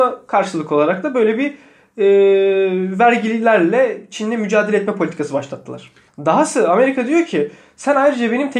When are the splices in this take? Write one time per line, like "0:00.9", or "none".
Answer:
0:06.1